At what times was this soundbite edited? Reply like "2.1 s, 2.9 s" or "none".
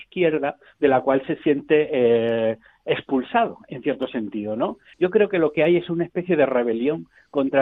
4.9 s